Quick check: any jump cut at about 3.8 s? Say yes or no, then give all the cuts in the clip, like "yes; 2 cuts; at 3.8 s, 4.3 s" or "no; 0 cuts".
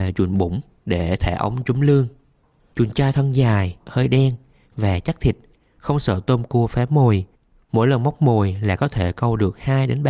yes; 1 cut; at 3.8 s